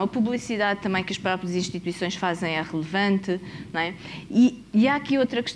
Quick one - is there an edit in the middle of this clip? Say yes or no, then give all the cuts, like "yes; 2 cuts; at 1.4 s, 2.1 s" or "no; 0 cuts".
no; 0 cuts